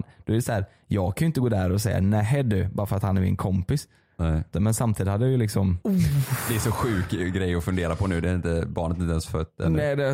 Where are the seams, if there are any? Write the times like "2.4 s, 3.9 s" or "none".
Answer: 4.5 s